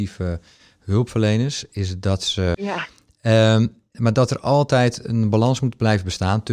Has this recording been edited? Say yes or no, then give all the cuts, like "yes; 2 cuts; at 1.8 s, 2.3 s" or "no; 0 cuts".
yes; 2 cuts; at 2.5 s, 3.9 s